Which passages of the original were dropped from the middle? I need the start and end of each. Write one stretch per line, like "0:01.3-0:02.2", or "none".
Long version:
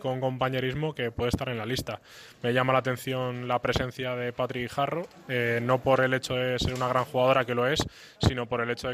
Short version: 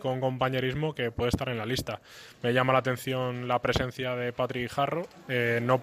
none

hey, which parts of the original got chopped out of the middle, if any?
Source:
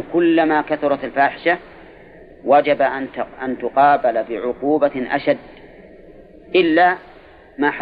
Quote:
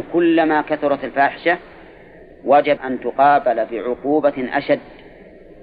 0:02.8-0:03.4

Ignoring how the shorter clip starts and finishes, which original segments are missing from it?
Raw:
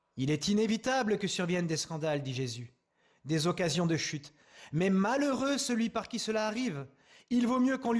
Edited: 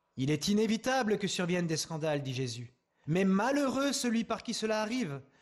0:03.0-0:04.7

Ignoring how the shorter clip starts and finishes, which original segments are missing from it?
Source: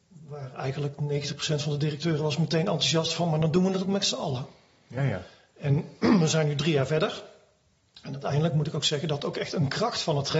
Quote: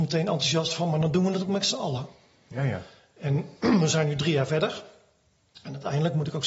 none

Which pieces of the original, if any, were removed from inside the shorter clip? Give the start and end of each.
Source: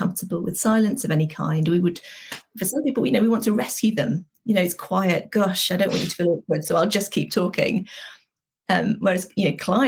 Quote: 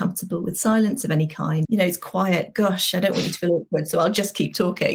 0:01.6-0:04.4

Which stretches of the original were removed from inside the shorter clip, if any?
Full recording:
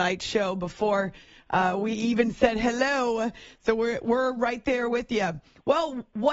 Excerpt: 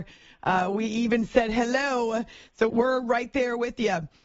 0:03.8-0:04.0

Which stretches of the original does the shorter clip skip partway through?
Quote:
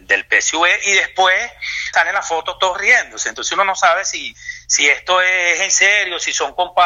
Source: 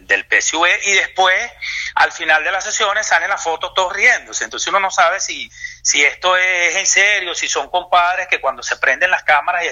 0:01.9-0:03.1

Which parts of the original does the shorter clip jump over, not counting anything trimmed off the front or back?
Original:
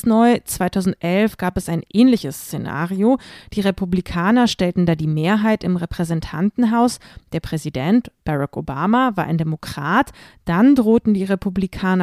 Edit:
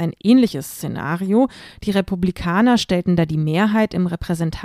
none

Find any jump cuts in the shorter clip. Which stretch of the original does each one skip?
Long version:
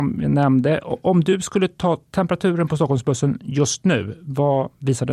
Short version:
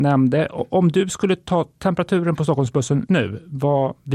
0:03.4-0:03.8

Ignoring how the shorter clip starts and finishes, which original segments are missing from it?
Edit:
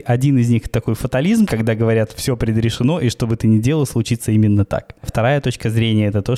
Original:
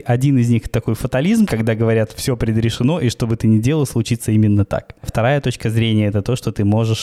none

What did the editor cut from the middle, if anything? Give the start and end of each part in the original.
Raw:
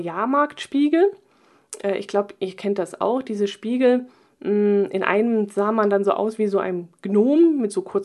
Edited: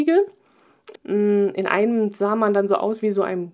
0:01.8-0:04.3

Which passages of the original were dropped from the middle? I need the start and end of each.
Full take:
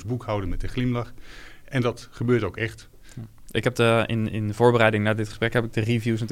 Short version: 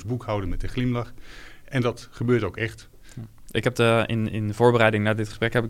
none

